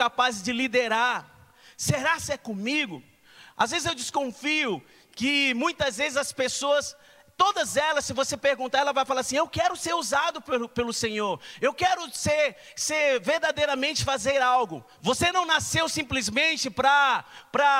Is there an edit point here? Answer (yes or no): yes